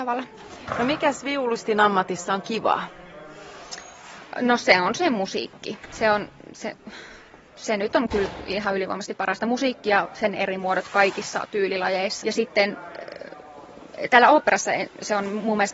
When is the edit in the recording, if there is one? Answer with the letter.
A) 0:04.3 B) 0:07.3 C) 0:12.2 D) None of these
C